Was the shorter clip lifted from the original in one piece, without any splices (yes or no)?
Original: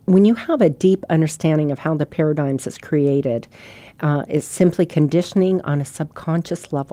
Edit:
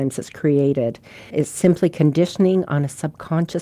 no